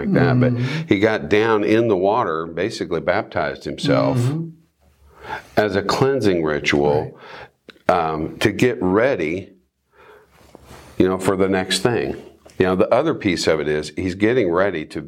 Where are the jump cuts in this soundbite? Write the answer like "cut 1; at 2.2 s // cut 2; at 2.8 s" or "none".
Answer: none